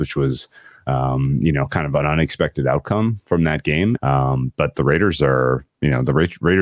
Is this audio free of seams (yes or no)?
no